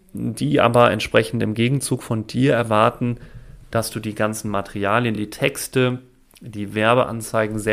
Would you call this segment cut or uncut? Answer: uncut